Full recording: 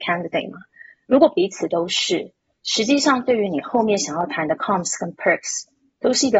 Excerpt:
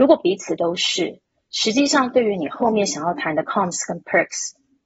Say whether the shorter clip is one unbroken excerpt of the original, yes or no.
yes